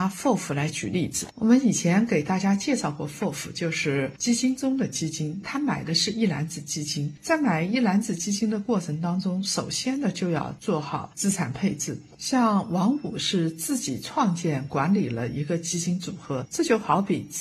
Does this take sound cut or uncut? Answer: uncut